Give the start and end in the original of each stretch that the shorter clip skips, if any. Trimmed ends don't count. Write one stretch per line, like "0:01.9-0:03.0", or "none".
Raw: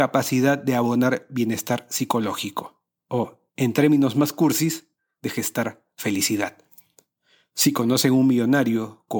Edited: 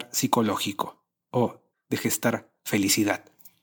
0:03.5-0:05.1